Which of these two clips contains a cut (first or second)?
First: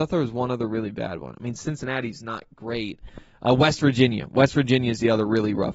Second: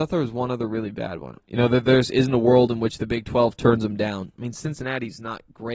second